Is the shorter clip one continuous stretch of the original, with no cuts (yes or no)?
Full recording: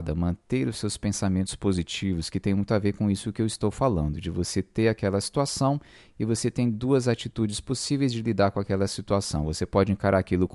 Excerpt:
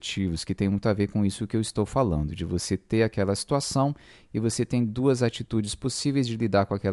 yes